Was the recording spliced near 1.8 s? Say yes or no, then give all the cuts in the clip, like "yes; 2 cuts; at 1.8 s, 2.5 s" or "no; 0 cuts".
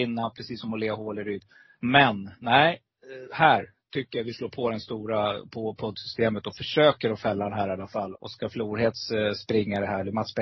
yes; 2 cuts; at 1.8 s, 8.1 s